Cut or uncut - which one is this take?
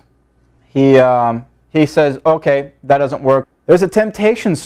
cut